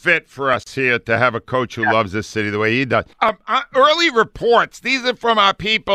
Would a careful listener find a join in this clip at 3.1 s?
yes; 1 cut; at 3.1 s

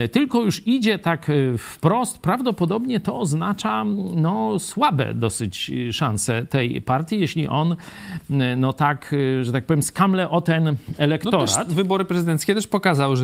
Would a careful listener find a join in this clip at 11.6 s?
no; 0 cuts

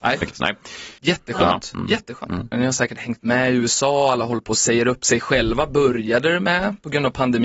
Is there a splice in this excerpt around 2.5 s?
yes; 2 cuts; at 1.0 s, 2.5 s

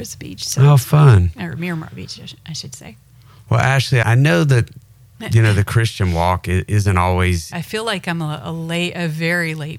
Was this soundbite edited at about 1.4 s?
no; 2 cuts; at 4.0 s, 7.5 s

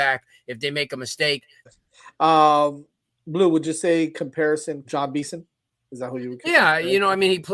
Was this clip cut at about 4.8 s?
yes; 2 cuts; at 1.7 s, 4.8 s

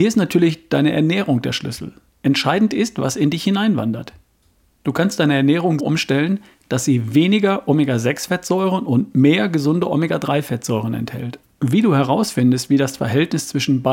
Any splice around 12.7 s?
no; 2 cuts; at 5.8 s, 11.4 s

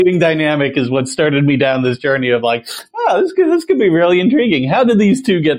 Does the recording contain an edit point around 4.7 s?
no; 0 cuts

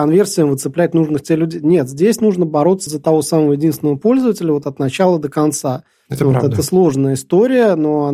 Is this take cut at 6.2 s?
no; 1 cut; at 2.9 s

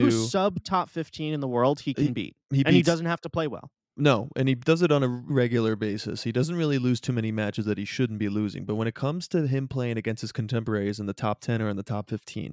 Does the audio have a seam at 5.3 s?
yes; 1 cut; at 5.3 s

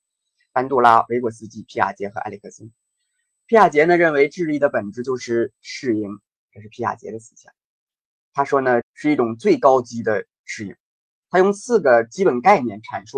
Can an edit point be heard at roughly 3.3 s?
no; 1 cut; at 8.8 s

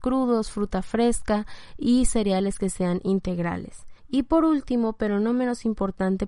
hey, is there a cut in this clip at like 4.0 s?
yes; 1 cut; at 4.0 s

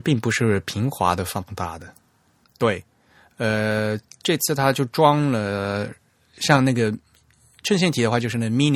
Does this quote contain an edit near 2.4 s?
yes; 1 cut; at 2.4 s

